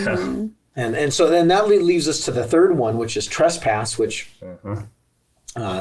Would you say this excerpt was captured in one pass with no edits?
yes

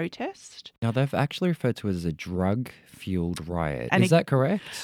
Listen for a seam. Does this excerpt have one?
yes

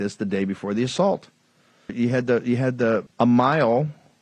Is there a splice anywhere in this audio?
yes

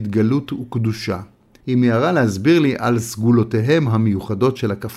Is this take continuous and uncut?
no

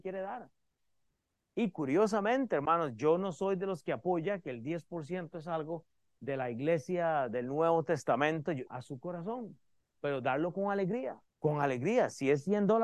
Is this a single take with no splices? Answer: no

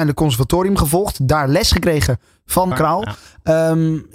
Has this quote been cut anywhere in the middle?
yes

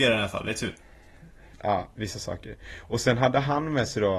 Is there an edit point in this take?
yes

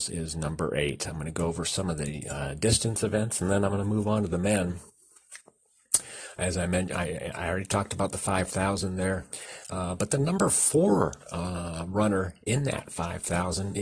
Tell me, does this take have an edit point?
no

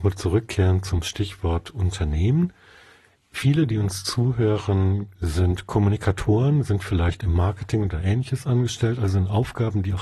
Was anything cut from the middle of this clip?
no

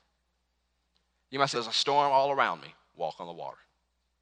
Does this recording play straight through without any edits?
no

